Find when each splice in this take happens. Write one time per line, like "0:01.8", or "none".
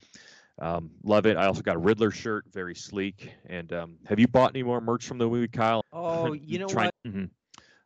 0:05.8
0:06.9